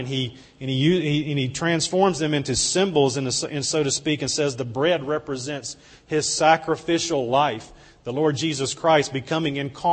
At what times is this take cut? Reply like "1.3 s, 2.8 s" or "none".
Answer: none

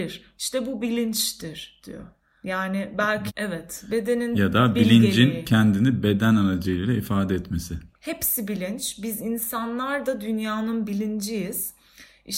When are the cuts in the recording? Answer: 3.3 s

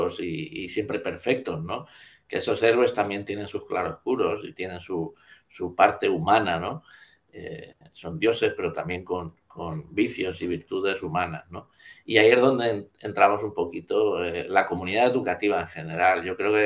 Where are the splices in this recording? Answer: none

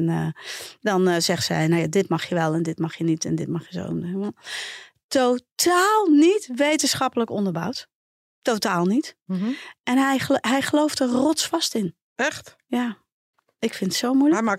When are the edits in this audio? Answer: none

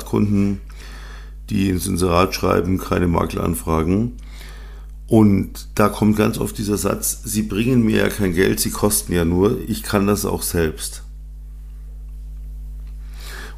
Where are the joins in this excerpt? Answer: none

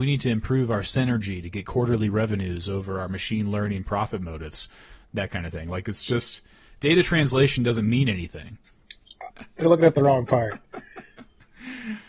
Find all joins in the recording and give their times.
9.3 s

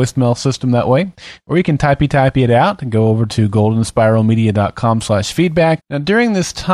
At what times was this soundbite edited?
5.8 s

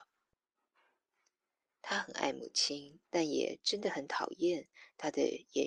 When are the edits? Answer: 1.6 s, 3.1 s

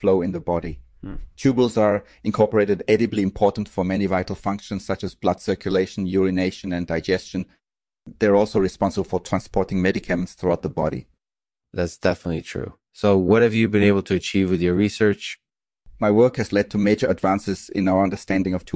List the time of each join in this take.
none

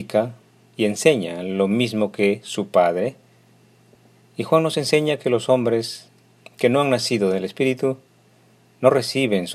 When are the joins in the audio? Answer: none

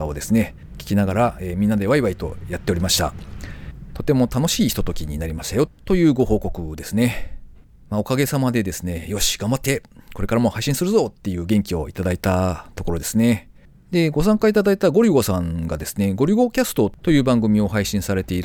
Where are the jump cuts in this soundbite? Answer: none

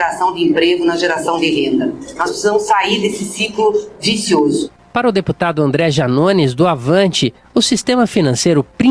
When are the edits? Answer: none

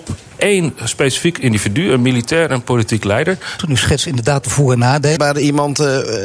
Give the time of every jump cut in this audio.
3.6 s, 5.2 s

